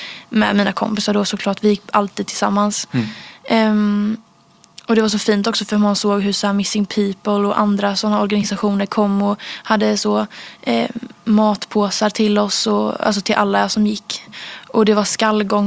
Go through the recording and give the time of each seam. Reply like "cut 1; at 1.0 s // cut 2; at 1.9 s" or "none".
none